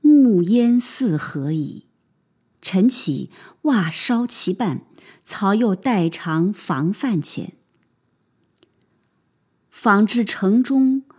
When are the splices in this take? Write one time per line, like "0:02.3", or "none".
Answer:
0:02.5